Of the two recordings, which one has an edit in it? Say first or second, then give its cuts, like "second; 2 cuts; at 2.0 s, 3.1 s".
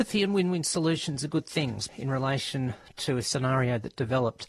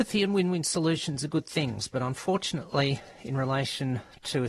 first; 1 cut; at 1.9 s